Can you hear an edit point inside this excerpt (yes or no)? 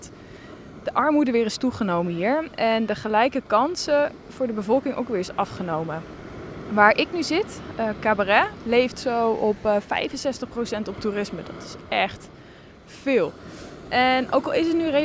no